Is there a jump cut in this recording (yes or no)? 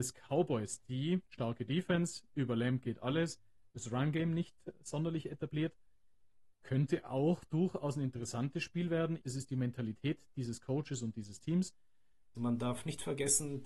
yes